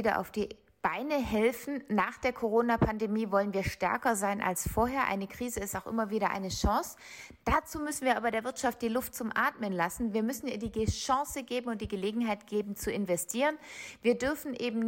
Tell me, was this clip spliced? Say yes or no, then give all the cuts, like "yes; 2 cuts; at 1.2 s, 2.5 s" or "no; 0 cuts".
no; 0 cuts